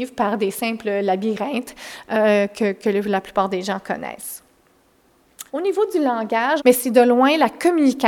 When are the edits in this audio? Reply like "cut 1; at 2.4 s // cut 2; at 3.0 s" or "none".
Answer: cut 1; at 5.5 s // cut 2; at 6.6 s